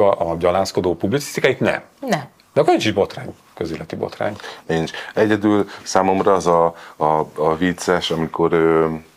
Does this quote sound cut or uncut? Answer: uncut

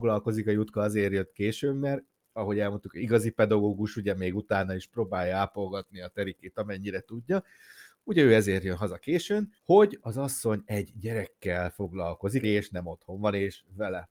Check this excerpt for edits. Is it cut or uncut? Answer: cut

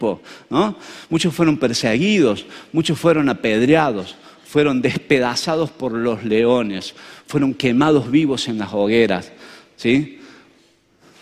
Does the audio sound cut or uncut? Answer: uncut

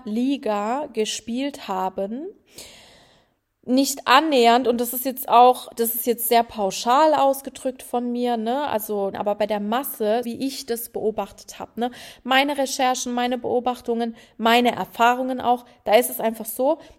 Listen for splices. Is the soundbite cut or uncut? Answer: cut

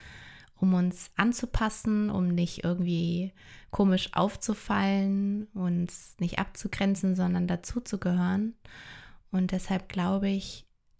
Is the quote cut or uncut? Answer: uncut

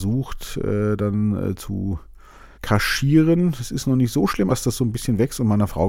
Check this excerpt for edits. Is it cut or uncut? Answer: cut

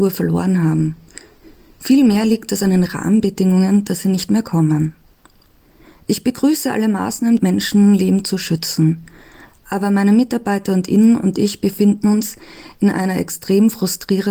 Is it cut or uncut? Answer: cut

